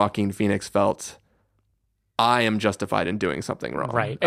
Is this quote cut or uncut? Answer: uncut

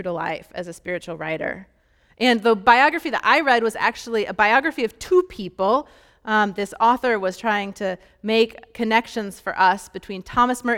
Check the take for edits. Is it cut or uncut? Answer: uncut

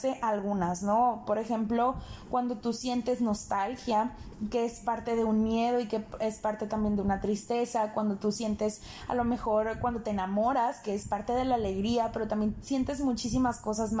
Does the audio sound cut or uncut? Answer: uncut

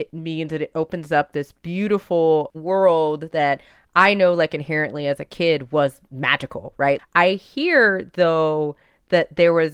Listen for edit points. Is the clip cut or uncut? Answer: cut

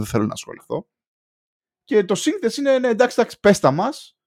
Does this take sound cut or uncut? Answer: uncut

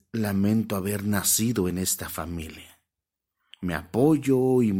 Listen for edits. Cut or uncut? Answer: cut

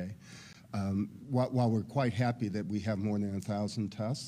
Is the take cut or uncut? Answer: cut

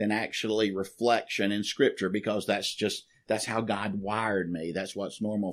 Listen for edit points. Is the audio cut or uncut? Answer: uncut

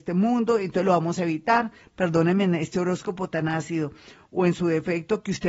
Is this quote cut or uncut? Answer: uncut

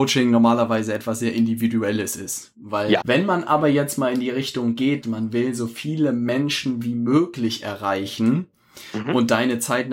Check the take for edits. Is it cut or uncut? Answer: cut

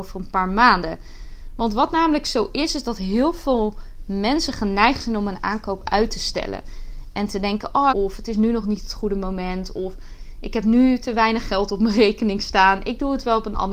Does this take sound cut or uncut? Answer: cut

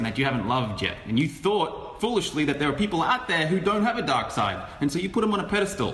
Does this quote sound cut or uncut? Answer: uncut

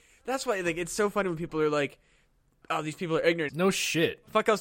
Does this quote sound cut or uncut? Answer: cut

